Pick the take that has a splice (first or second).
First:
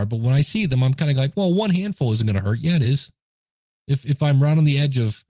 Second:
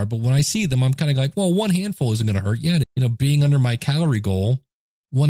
second